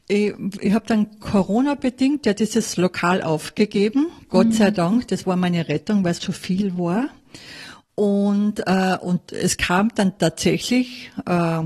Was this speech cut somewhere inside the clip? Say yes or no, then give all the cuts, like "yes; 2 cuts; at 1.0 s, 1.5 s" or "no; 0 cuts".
yes; 1 cut; at 6.2 s